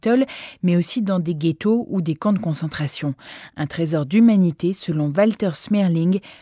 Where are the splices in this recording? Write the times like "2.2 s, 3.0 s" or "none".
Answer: none